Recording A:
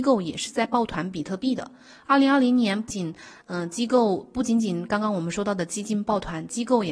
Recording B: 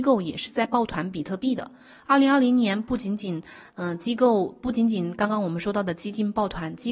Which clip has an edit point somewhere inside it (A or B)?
A